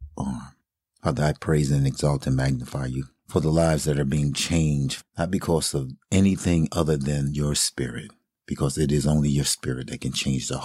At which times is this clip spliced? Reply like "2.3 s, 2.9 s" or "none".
none